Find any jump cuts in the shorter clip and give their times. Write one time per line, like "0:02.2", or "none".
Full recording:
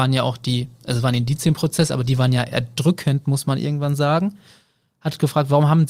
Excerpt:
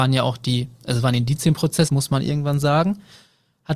0:01.9